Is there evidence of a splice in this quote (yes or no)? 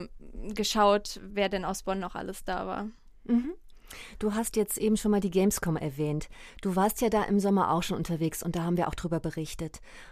no